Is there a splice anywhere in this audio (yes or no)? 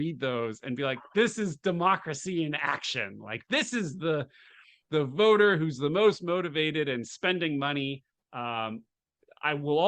no